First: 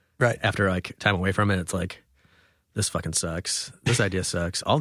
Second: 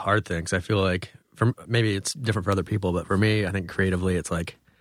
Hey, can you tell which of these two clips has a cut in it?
second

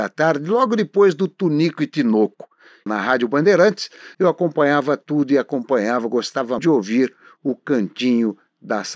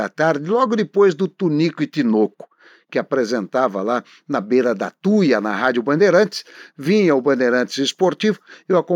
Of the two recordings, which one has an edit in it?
first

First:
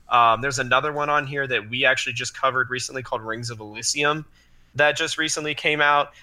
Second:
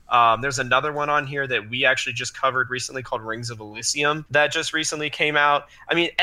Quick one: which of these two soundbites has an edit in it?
second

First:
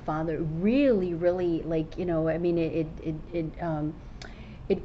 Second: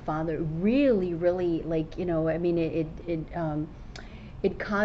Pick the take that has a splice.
second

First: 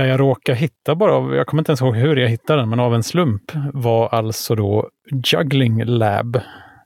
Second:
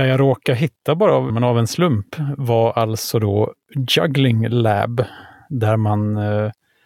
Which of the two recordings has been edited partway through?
second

